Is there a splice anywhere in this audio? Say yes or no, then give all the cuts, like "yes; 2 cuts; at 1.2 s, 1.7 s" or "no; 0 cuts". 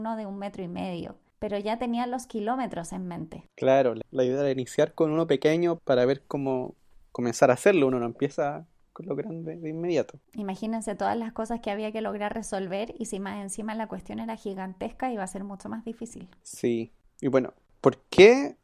no; 0 cuts